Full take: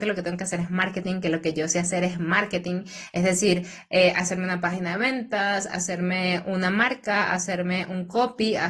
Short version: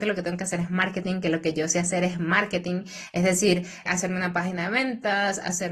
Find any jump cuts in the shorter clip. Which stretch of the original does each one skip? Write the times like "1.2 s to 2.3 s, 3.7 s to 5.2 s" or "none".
3.9 s to 4.1 s